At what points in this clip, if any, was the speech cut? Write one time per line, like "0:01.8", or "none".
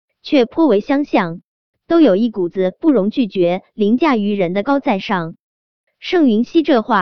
0:04.6